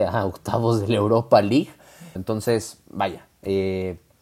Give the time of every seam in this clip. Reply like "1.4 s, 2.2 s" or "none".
2.2 s